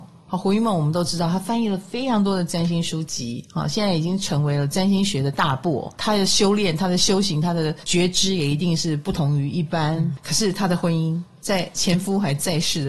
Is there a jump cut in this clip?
no; 0 cuts

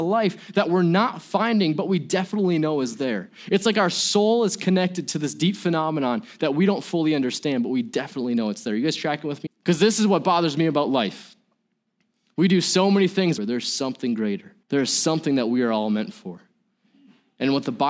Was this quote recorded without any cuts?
no; 3 cuts; at 9.5 s, 13.4 s, 14.6 s

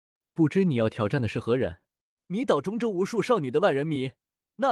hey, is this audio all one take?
no; 1 cut; at 2.2 s

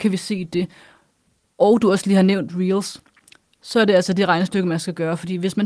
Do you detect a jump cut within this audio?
no; 0 cuts

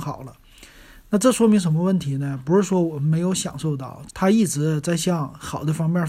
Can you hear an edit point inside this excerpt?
yes; 1 cut; at 4.1 s

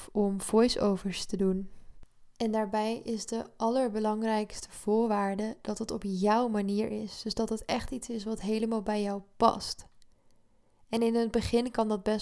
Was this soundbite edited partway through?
no; 0 cuts

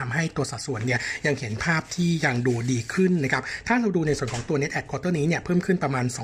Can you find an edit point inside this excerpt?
no; 0 cuts

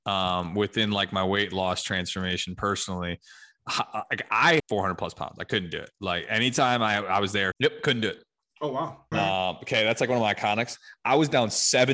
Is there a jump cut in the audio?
yes; 3 cuts; at 4.6 s, 7.5 s, 9.1 s

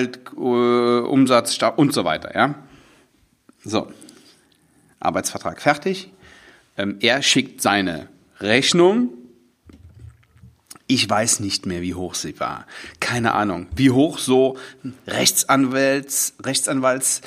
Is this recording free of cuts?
yes; 0 cuts

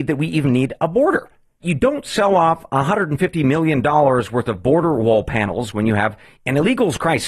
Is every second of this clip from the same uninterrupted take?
no; 1 cut; at 1.6 s

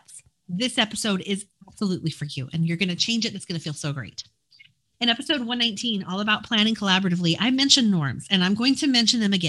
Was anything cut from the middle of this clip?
no; 0 cuts

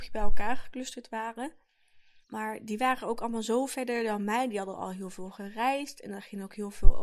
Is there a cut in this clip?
yes; 1 cut; at 2.2 s

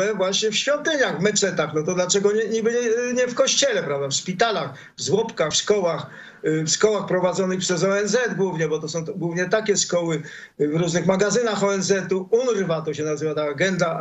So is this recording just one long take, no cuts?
yes; 0 cuts

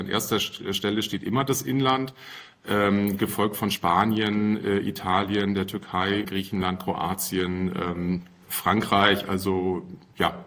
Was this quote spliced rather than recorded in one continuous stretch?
yes; 1 cut; at 6.2 s

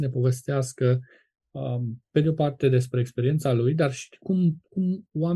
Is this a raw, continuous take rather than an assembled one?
yes; 0 cuts

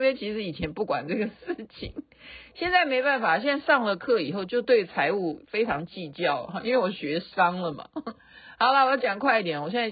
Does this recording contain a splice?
no; 0 cuts

